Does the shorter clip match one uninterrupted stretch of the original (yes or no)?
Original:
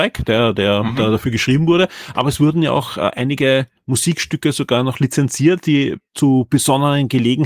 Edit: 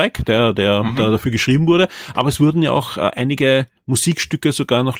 yes